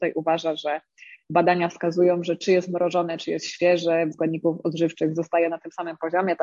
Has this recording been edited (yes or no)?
yes